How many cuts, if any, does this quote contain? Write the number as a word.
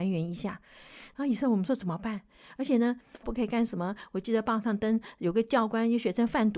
one